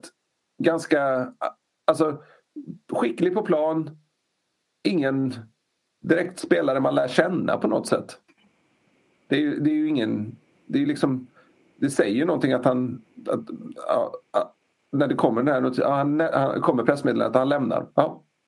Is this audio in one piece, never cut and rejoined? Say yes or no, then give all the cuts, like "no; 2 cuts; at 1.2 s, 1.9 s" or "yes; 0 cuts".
yes; 0 cuts